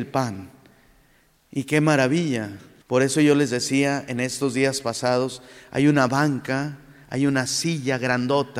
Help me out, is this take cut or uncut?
cut